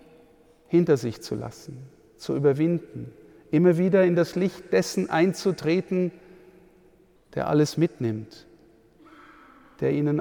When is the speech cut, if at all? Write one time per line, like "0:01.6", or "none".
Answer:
0:07.2